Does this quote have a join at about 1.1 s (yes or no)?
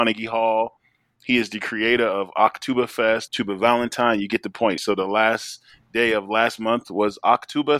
no